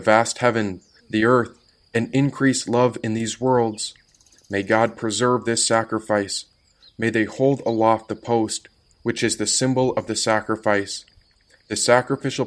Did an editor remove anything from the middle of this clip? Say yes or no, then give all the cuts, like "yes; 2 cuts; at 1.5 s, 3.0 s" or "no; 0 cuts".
yes; 1 cut; at 1.0 s